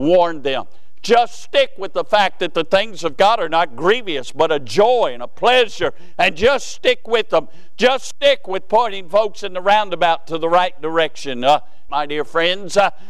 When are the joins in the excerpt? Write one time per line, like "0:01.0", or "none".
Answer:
0:11.9